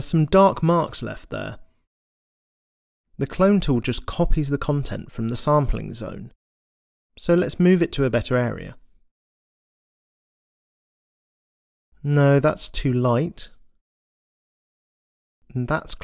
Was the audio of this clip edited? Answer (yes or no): no